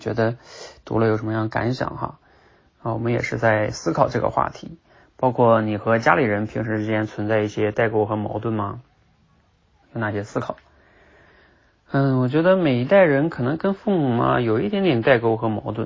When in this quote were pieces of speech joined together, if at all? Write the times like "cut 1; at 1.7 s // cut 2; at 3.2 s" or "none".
cut 1; at 9.8 s

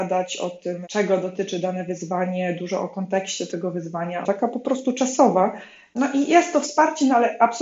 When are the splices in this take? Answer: cut 1; at 4.2 s

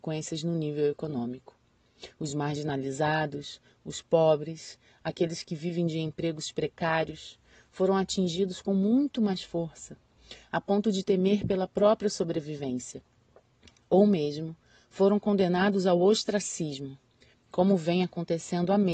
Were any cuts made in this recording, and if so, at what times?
cut 1; at 17.3 s

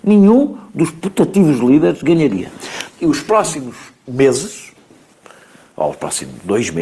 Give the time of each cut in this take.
cut 1; at 2.9 s

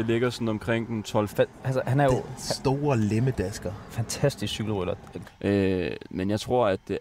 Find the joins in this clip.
cut 1; at 1.3 s // cut 2; at 5.2 s

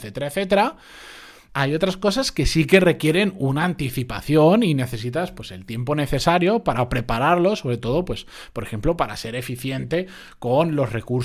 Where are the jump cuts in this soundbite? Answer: cut 1; at 1.5 s

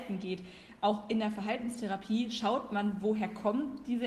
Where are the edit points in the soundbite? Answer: none

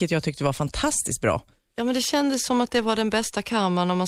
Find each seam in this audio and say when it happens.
none

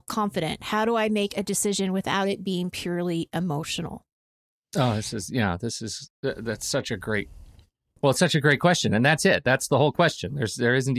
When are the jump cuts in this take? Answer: none

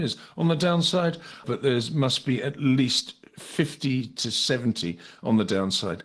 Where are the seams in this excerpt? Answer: cut 1; at 1.4 s

